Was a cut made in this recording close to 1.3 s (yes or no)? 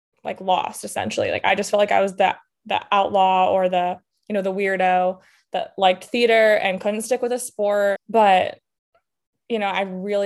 no